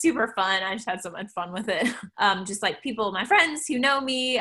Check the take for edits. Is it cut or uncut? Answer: cut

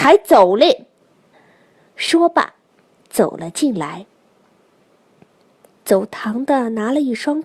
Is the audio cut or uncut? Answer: uncut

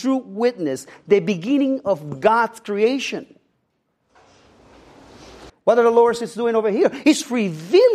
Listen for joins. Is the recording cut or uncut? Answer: cut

